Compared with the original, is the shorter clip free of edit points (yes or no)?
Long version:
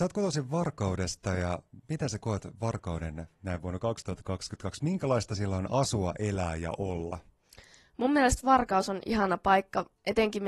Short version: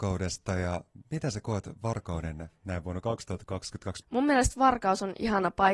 no